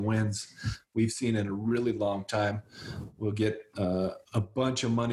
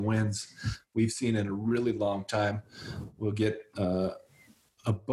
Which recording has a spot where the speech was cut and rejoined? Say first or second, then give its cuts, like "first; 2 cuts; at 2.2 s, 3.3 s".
first; 1 cut; at 4.2 s